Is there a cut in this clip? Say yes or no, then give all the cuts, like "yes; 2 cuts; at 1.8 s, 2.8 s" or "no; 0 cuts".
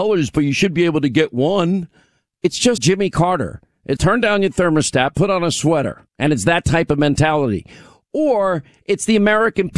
yes; 3 cuts; at 2.8 s, 4.0 s, 6.1 s